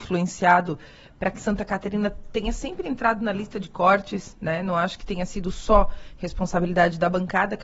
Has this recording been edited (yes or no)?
no